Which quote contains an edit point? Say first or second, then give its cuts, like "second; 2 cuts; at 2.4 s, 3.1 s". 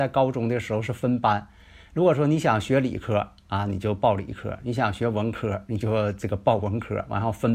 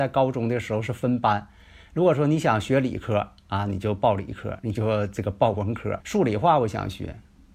second; 2 cuts; at 4.6 s, 6.0 s